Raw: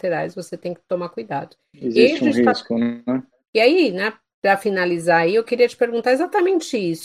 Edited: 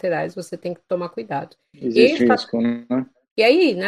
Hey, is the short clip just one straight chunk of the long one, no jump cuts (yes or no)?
no